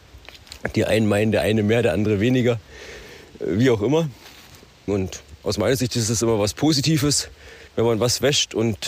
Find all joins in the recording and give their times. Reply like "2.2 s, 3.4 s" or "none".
4.9 s, 7.7 s